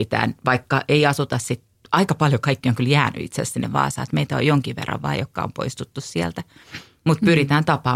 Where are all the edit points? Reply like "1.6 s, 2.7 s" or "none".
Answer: none